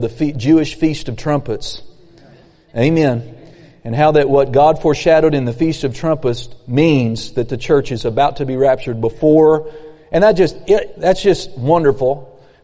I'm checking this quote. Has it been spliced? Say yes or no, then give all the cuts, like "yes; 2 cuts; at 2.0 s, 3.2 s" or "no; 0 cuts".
no; 0 cuts